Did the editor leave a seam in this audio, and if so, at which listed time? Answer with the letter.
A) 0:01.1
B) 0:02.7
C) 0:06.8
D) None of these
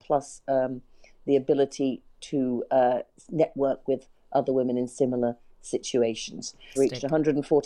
C